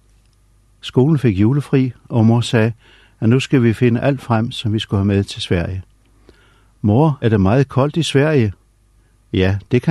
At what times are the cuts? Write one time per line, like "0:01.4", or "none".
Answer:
0:07.2